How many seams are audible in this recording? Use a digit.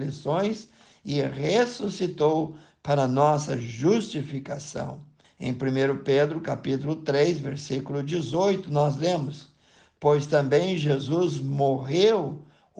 1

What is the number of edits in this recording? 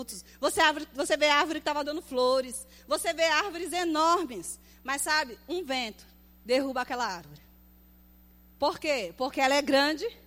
0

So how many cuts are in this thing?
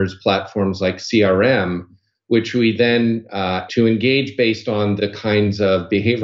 2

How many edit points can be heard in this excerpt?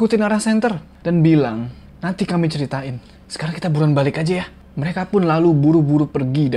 1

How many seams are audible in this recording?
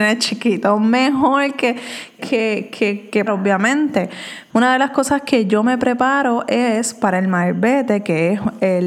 3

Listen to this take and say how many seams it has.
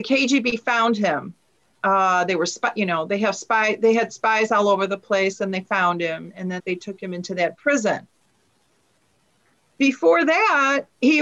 1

